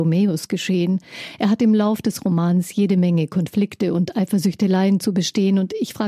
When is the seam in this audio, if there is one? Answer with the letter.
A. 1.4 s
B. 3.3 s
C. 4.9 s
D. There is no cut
D